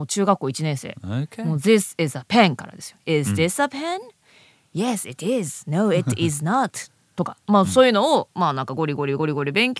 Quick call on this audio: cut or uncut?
uncut